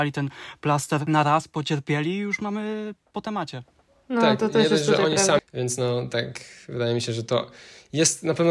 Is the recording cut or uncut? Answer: cut